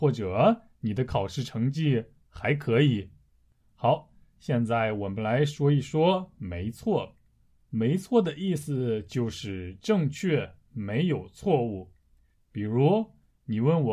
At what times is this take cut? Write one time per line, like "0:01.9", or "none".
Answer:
none